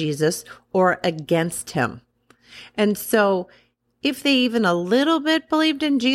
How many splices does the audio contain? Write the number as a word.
zero